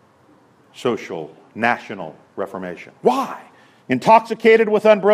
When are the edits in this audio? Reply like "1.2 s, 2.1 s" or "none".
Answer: 3.8 s